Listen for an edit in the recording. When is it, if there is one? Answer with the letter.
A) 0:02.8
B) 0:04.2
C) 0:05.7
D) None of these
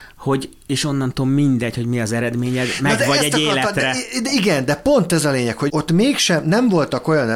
C